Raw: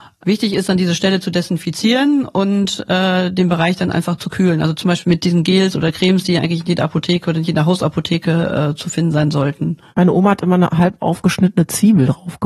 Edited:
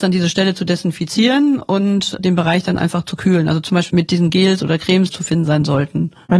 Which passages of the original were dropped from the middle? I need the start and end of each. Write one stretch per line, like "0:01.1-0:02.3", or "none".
0:02.9-0:03.3
0:06.2-0:08.8